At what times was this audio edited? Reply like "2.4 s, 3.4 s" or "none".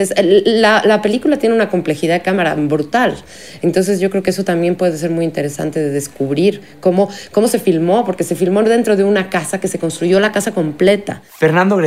none